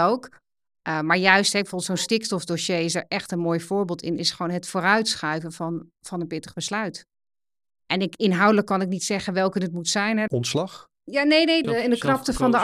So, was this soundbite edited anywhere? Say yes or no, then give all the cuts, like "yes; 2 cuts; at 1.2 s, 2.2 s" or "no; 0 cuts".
yes; 3 cuts; at 6.0 s, 10.3 s, 11.6 s